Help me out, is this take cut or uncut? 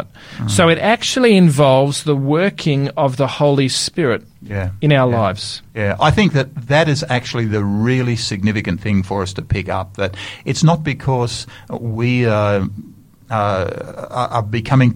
cut